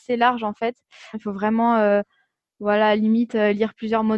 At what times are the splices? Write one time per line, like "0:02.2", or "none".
0:01.1